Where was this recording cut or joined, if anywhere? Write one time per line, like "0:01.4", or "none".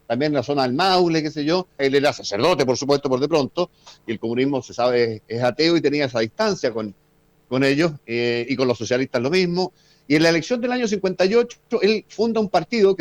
0:01.8